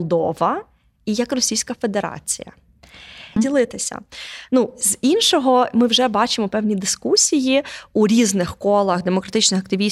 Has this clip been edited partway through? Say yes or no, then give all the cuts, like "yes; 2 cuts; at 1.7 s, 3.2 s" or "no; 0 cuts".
yes; 1 cut; at 3.4 s